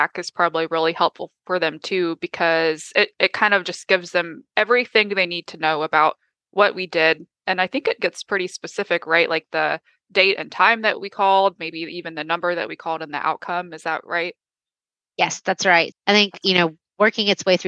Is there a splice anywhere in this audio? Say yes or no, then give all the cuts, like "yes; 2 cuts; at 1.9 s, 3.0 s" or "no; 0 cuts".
yes; 1 cut; at 15.9 s